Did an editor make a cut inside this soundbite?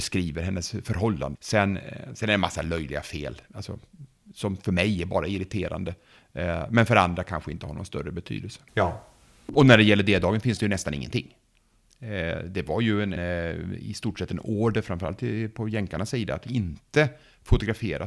yes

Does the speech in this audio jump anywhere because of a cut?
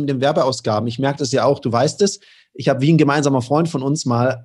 no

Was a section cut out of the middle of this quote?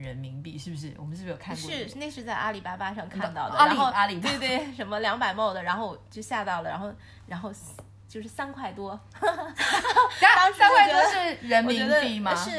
no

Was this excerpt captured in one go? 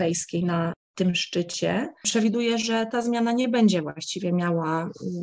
yes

